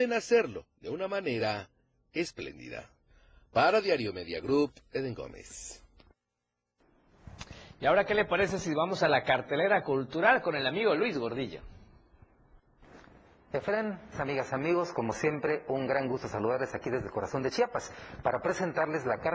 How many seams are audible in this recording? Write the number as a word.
one